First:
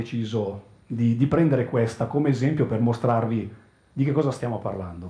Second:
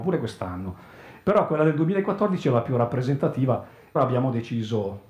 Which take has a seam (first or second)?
second